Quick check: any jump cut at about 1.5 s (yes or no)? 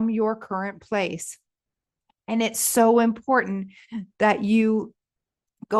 no